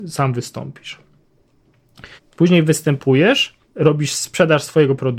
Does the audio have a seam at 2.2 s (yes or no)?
yes